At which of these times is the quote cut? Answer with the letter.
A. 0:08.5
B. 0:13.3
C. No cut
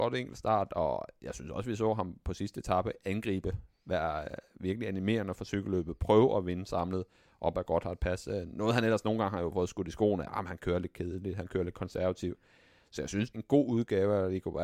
B